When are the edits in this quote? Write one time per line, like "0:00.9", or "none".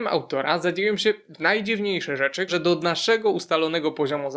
0:02.5